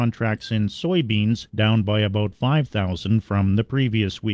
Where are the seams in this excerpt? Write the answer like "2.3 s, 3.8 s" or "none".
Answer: 1.5 s